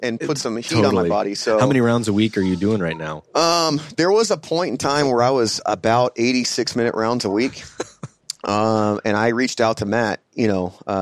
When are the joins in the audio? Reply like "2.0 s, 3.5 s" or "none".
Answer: none